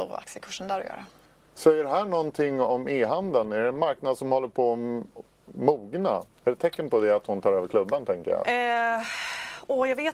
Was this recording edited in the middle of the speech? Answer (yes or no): yes